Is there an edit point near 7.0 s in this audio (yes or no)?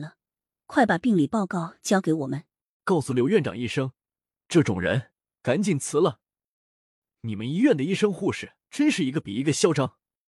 yes